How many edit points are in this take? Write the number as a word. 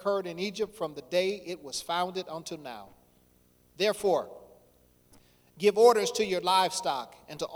zero